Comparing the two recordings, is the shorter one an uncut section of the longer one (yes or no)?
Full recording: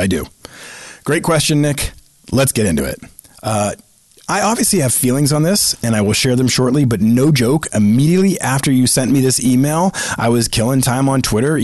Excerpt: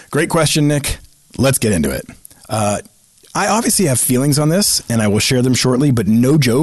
yes